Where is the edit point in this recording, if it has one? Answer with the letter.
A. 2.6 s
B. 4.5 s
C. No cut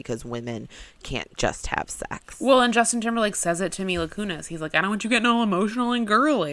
C